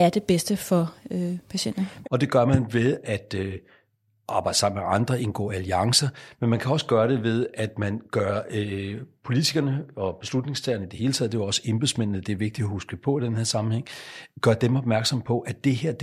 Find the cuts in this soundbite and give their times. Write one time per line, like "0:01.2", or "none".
0:02.0